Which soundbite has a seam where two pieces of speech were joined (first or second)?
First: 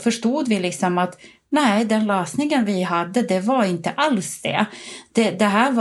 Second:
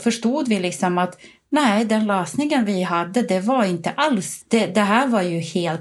second